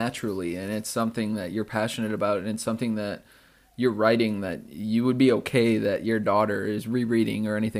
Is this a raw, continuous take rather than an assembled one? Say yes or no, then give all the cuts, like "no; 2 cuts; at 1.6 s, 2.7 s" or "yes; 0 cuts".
yes; 0 cuts